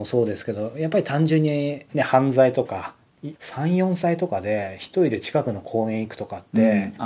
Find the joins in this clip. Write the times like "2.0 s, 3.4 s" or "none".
3.4 s